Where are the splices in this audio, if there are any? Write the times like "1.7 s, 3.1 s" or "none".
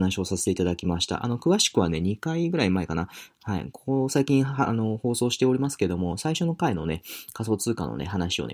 none